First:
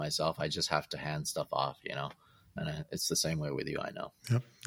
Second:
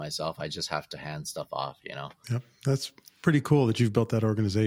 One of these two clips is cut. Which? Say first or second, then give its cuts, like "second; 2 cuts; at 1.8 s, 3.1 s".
second; 1 cut; at 2.2 s